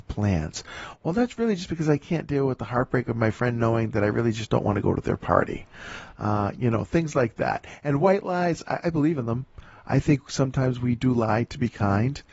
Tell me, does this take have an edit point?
no; 0 cuts

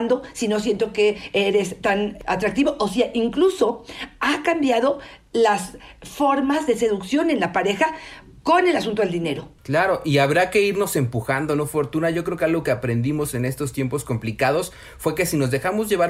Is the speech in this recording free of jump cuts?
yes; 0 cuts

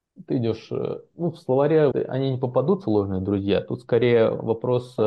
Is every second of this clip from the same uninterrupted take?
no; 1 cut; at 1.9 s

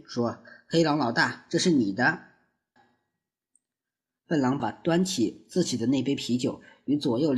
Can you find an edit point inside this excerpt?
yes; 2 cuts; at 2.8 s, 4.6 s

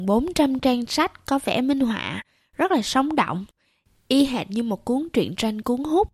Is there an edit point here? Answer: no; 0 cuts

